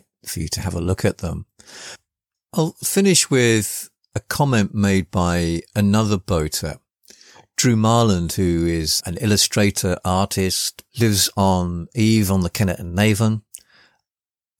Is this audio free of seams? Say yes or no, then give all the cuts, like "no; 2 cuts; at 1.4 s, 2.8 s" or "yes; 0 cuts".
no; 3 cuts; at 2.3 s, 9.0 s, 10.9 s